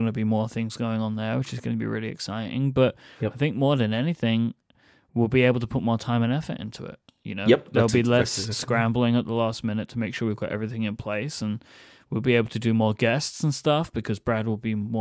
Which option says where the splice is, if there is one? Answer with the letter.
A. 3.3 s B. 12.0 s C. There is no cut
C